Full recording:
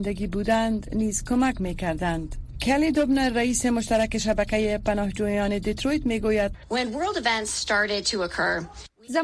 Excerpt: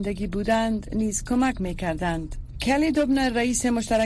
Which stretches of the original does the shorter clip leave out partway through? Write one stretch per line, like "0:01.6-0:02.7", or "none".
none

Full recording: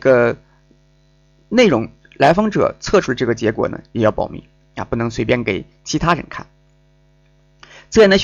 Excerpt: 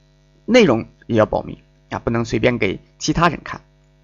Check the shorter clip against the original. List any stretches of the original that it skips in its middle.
0:02.1-0:03.9

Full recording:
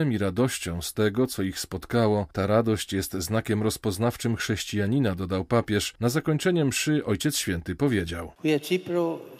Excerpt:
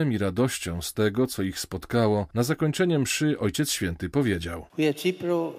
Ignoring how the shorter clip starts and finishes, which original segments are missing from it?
0:02.3-0:06.0

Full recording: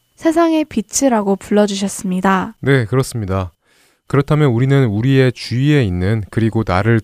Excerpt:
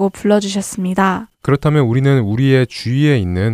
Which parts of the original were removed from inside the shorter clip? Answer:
0:02.6-0:04.0

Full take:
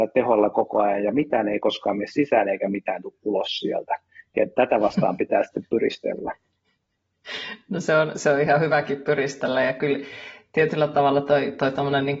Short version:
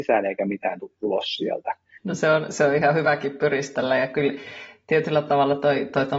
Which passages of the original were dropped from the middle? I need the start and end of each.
0:04.2-0:07.6

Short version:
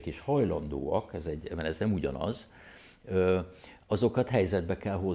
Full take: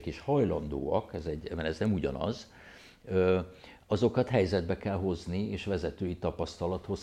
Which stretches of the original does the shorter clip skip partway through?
none

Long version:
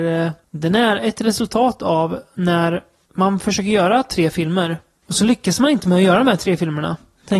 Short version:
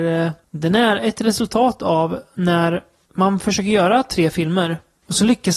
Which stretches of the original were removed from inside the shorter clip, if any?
none

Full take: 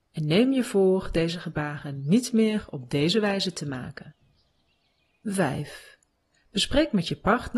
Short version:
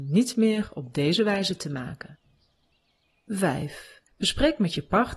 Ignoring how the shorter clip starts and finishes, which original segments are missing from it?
0:06.0-0:06.4

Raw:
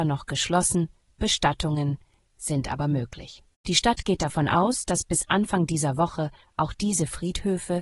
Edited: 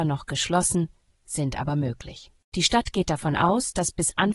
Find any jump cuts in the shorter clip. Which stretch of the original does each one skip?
0:01.1-0:02.2

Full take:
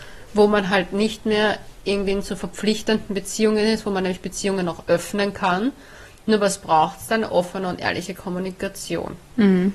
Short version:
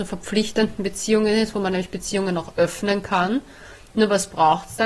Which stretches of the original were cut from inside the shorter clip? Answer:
none

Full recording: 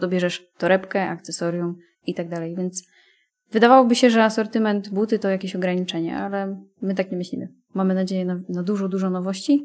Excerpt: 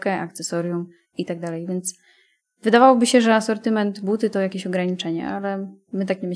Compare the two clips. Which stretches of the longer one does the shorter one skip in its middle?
none

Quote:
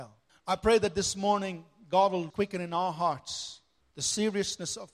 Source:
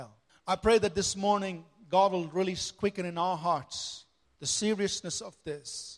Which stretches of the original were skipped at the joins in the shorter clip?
0:02.3-0:02.7

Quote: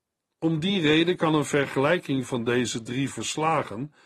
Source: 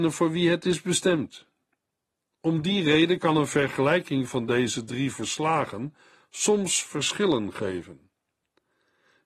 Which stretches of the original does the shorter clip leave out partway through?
none

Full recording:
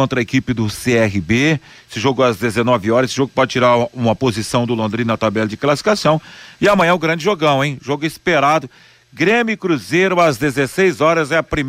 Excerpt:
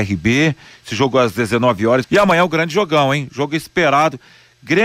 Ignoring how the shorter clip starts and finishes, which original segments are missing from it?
0:03.1-0:06.5

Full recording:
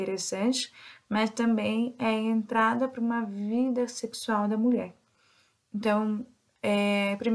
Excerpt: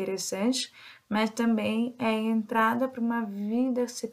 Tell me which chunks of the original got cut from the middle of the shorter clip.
none

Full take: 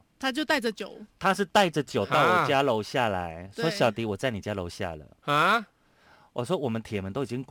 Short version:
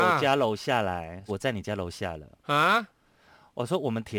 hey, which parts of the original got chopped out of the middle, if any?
0:03.5-0:04.1

